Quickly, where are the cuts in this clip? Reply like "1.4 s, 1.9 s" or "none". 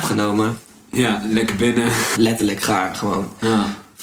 2.1 s

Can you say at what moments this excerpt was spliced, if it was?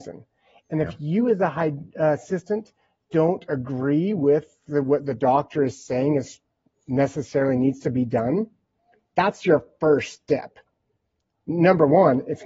none

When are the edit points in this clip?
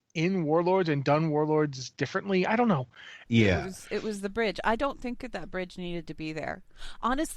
3.3 s

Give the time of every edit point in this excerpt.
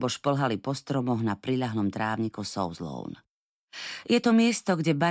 none

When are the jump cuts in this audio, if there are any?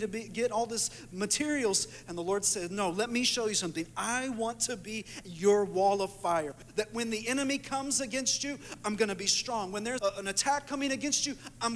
10.0 s

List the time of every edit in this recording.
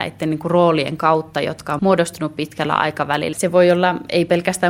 1.8 s, 3.3 s

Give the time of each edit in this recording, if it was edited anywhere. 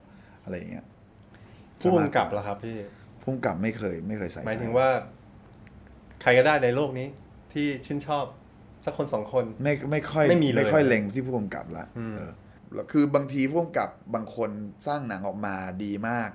12.2 s

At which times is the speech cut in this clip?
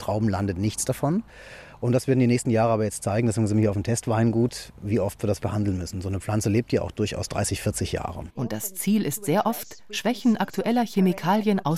5.4 s, 8.4 s

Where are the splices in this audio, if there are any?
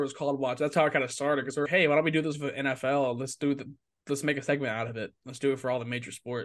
1.7 s

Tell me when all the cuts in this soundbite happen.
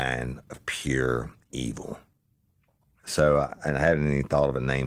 none

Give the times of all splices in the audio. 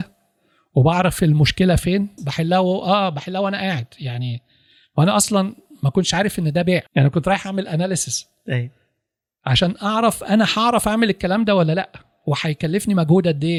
2.2 s, 6.9 s

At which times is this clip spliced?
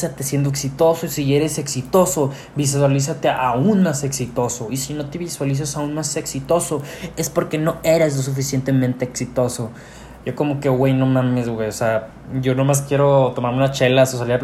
none

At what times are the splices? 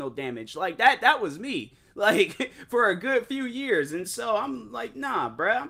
none

